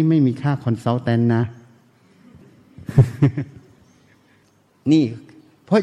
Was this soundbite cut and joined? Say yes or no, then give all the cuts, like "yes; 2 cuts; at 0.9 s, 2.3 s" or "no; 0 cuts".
no; 0 cuts